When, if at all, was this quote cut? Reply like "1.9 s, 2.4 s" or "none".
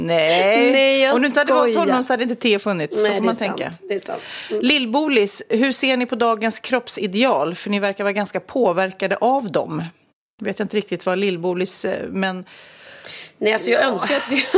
none

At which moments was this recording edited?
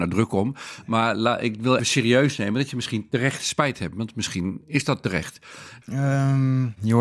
1.8 s, 5.8 s

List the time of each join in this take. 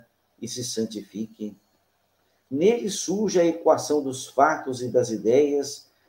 none

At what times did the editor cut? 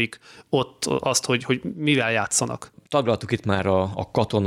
none

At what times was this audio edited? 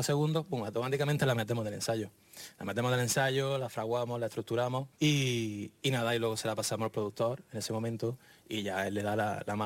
4.9 s

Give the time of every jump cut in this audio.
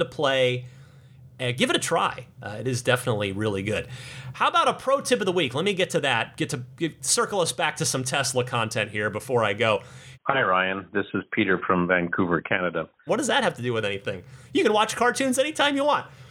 10.1 s, 13.1 s

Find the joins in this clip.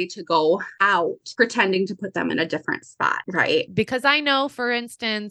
3.7 s

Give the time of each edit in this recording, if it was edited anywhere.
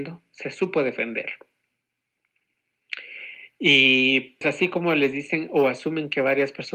4.4 s

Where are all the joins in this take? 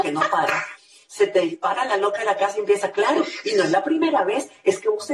none

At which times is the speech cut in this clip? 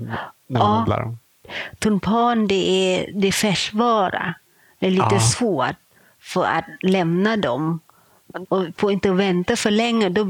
8.5 s

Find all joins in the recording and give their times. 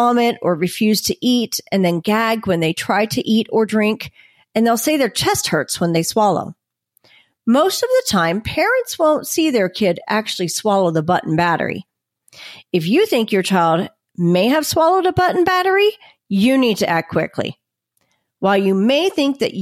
none

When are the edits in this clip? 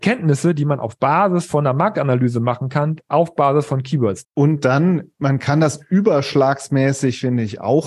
4.2 s

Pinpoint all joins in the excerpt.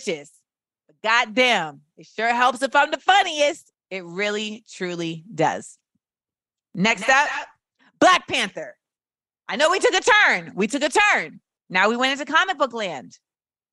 3.7 s

